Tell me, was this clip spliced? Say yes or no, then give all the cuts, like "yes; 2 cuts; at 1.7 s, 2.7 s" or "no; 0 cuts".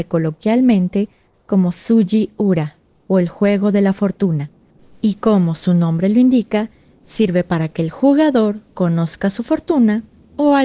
no; 0 cuts